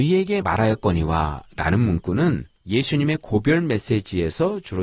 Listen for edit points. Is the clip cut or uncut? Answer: cut